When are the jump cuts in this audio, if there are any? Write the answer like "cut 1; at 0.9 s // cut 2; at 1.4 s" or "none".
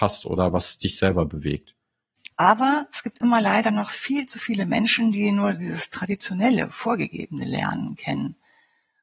cut 1; at 2.3 s